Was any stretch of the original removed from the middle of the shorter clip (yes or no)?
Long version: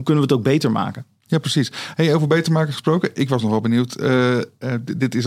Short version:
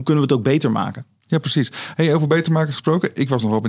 no